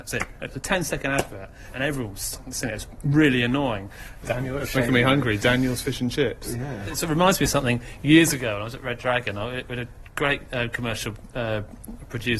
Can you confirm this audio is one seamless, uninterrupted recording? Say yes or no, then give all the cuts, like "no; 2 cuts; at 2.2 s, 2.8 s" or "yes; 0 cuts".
no; 2 cuts; at 1.7 s, 4.2 s